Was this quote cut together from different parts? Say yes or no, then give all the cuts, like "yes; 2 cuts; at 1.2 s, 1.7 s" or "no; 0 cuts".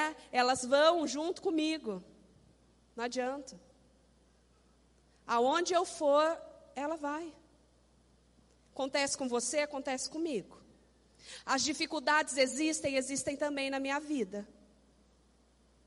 no; 0 cuts